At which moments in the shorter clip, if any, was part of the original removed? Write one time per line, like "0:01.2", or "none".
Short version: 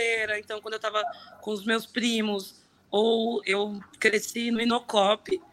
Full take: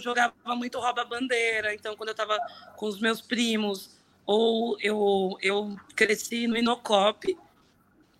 0:03.4